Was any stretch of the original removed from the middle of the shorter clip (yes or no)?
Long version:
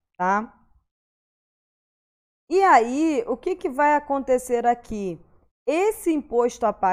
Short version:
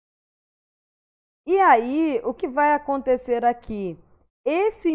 yes